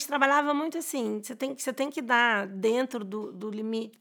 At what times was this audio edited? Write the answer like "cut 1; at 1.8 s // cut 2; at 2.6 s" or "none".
none